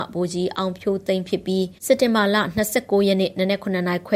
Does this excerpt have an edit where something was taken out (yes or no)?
yes